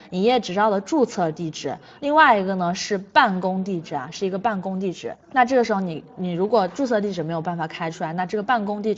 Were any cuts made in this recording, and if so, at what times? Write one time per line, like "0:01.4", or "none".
0:05.2